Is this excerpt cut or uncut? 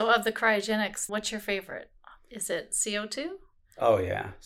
cut